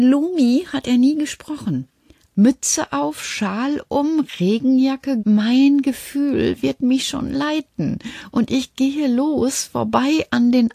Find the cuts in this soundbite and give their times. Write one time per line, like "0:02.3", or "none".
0:02.3
0:05.2